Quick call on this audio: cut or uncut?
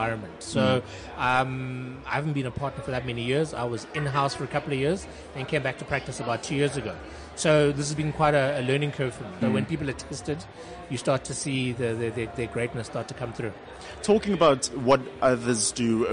cut